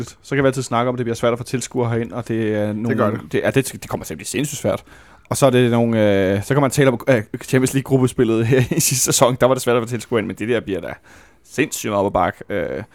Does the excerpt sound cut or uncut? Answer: uncut